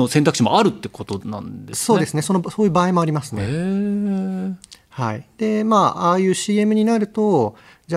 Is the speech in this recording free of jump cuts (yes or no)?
yes